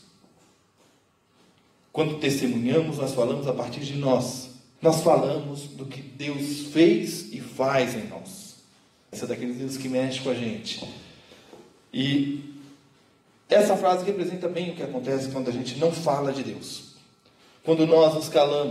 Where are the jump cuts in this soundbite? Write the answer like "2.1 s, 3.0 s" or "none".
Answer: 4.8 s, 9.1 s